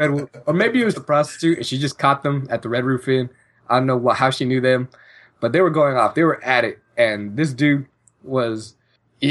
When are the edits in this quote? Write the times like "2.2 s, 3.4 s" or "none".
0.9 s